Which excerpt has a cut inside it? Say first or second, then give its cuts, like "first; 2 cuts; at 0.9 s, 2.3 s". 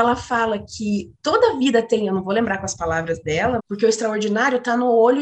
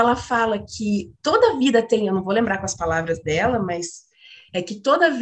first; 1 cut; at 3.6 s